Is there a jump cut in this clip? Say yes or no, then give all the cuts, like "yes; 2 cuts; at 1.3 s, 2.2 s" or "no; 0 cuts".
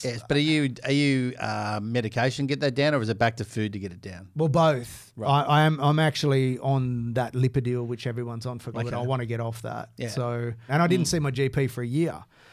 yes; 2 cuts; at 8.7 s, 10.7 s